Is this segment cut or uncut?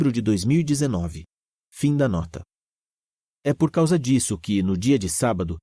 uncut